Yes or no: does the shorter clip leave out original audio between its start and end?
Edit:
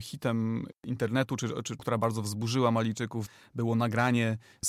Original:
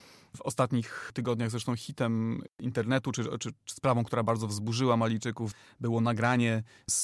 yes